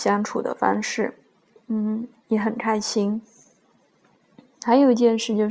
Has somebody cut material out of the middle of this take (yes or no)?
yes